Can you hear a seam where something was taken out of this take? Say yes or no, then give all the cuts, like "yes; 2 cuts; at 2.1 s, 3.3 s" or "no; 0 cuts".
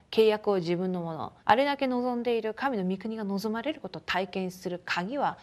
yes; 1 cut; at 1.4 s